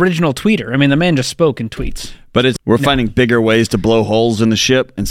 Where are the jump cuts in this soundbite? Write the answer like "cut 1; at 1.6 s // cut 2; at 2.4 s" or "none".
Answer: cut 1; at 2.6 s